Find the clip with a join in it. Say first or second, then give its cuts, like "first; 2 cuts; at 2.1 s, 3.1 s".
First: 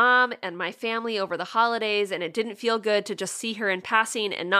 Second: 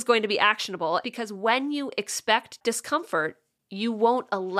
second; 1 cut; at 1.0 s